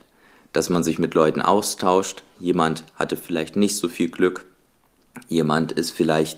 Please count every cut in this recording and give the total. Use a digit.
0